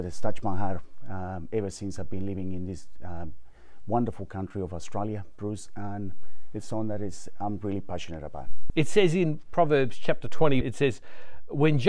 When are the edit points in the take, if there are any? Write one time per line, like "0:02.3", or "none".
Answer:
0:08.7
0:10.6